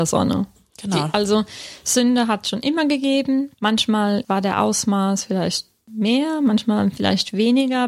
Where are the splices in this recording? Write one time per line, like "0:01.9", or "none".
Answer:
none